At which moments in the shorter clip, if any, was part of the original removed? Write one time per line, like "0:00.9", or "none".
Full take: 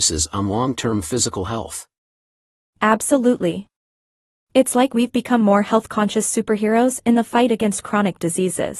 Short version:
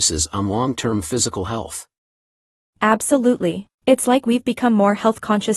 0:03.7